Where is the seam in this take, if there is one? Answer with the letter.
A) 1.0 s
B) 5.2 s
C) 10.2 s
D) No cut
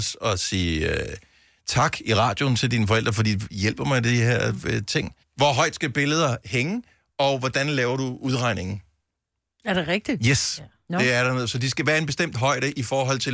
B